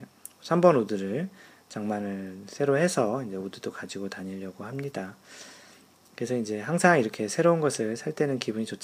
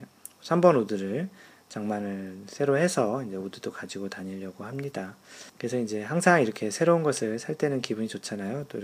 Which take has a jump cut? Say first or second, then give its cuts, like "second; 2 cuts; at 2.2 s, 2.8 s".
second; 1 cut; at 5.5 s